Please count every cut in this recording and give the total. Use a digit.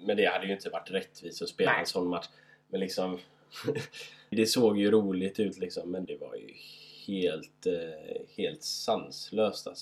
2